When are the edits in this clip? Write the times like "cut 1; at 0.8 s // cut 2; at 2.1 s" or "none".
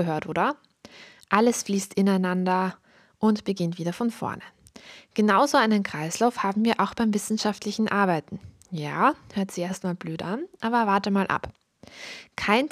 none